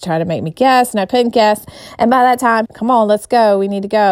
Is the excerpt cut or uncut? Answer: cut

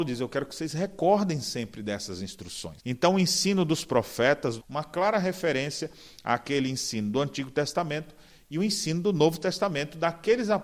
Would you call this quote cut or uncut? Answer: cut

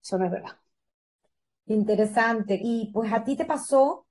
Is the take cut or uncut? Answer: cut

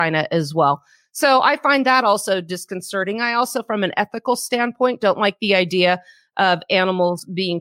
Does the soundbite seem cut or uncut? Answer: uncut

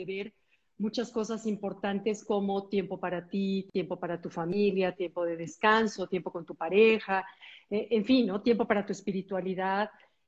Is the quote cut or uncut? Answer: uncut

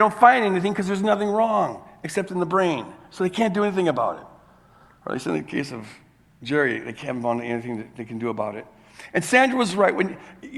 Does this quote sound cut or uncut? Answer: uncut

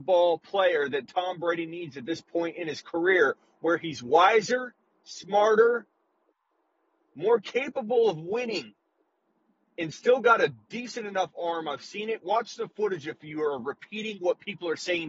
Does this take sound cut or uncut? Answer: uncut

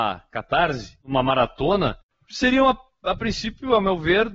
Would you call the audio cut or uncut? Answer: uncut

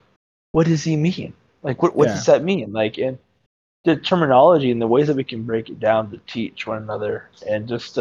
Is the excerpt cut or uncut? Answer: uncut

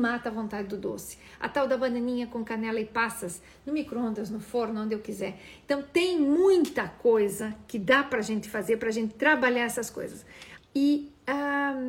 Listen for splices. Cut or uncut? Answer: cut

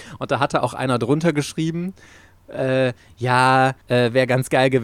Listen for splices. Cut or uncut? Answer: cut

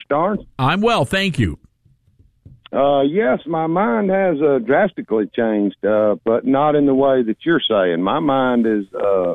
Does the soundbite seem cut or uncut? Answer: uncut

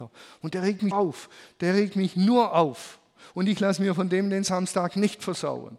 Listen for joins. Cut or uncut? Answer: cut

